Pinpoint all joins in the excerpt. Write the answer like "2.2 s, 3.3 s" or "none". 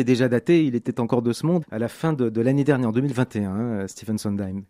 1.6 s